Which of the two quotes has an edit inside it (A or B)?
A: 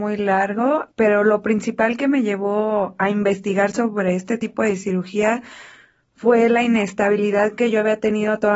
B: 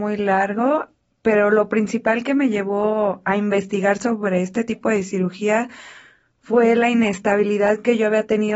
A